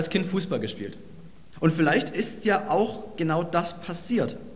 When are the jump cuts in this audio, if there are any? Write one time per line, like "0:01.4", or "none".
0:01.5